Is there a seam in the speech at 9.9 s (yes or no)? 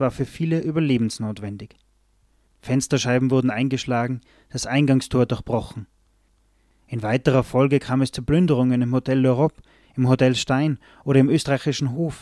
no